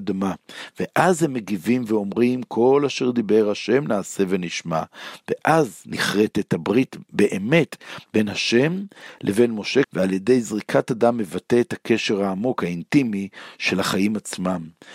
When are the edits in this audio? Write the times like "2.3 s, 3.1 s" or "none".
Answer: 9.8 s